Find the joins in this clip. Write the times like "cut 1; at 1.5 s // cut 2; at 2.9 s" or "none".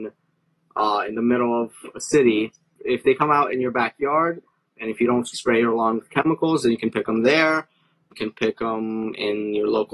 cut 1; at 5.3 s